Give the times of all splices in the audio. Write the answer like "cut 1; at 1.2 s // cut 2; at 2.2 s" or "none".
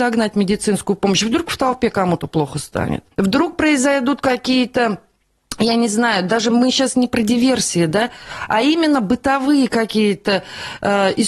cut 1; at 3.1 s

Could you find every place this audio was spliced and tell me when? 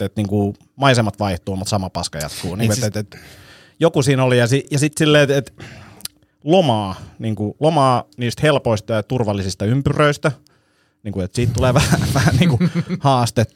none

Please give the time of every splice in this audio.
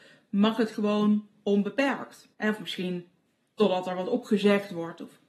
cut 1; at 2.3 s

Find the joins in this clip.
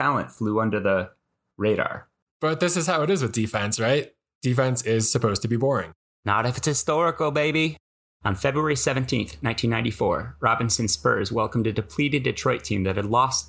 cut 1; at 2.2 s

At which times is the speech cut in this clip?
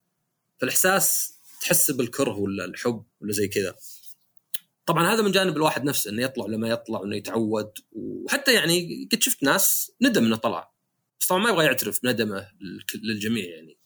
cut 1; at 3.1 s

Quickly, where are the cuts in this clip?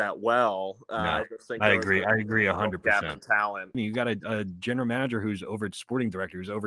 cut 1; at 3.7 s

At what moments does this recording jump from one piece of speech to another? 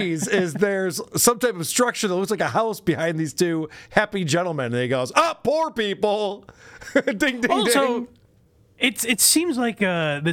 none

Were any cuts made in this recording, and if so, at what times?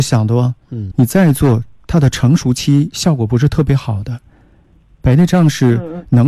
cut 1; at 0.9 s

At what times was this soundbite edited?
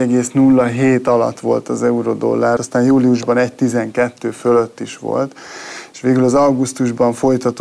cut 1; at 2.6 s

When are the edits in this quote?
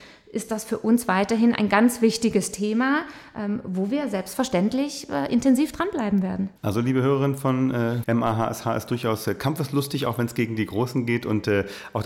cut 1; at 6.6 s // cut 2; at 8.0 s

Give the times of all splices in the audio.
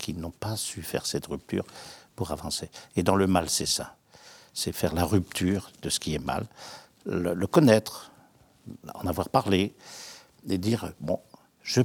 none

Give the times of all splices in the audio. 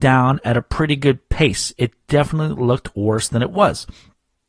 none

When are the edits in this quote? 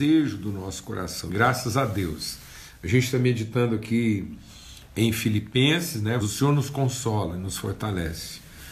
cut 1; at 1.3 s // cut 2; at 6.2 s

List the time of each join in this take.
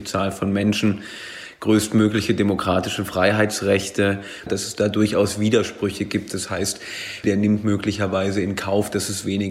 cut 1; at 4.5 s // cut 2; at 7.2 s

